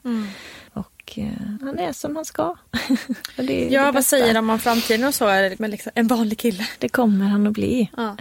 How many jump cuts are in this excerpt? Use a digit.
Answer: 3